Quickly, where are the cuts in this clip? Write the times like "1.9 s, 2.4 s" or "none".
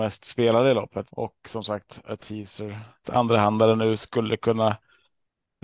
1.1 s, 3.0 s